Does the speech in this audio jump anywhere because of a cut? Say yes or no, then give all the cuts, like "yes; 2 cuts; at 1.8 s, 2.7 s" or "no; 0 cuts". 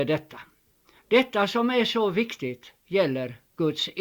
yes; 1 cut; at 1.0 s